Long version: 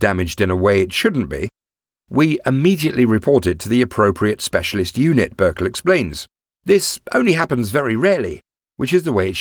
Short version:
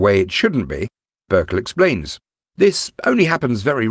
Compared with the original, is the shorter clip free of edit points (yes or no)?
no